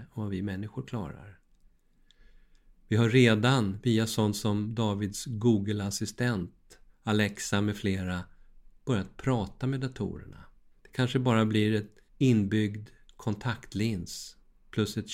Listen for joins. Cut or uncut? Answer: cut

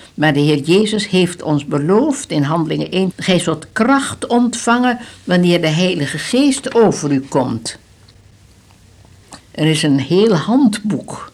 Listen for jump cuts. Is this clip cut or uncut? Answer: cut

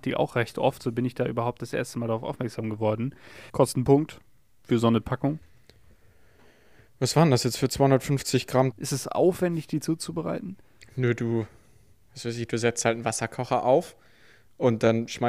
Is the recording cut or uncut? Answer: cut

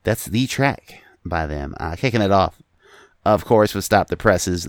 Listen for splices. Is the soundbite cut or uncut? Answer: uncut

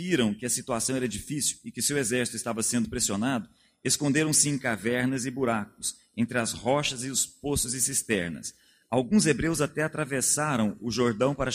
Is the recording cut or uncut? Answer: cut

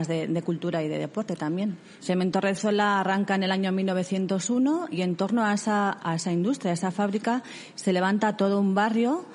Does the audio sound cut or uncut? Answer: cut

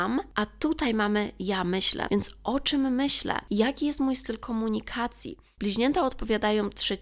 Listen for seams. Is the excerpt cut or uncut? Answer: uncut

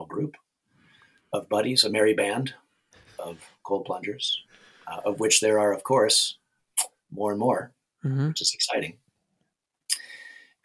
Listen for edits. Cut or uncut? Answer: uncut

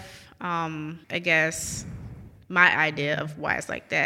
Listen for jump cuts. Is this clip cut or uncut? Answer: cut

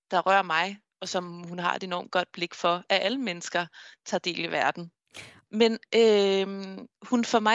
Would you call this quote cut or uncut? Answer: cut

